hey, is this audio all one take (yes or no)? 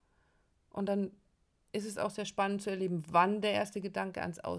yes